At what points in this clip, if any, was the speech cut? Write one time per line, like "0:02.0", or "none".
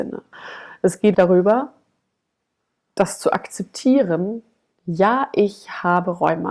0:01.1